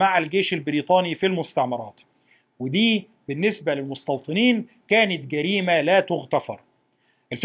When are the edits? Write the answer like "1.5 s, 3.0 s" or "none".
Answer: none